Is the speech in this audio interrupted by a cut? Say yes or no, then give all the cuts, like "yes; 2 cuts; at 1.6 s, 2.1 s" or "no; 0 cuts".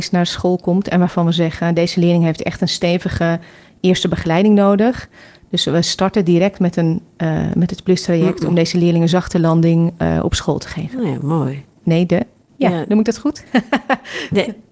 yes; 1 cut; at 11.7 s